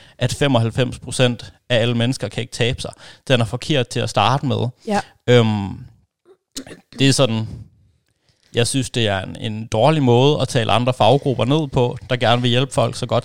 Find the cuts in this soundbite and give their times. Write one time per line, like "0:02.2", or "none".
none